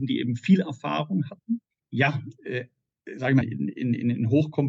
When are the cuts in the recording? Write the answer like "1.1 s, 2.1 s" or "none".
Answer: 1.8 s, 3.4 s